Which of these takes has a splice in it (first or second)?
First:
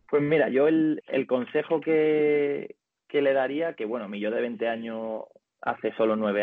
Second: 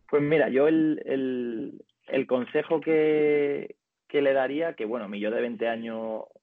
first